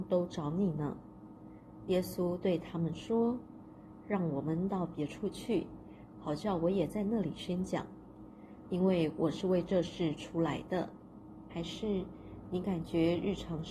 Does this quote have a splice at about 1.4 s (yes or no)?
no